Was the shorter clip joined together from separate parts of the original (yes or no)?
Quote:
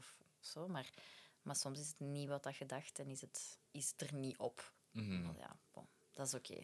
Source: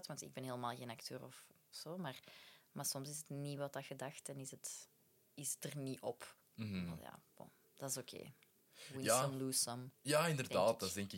yes